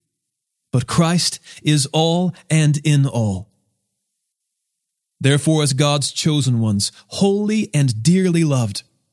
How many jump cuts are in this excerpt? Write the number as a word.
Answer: zero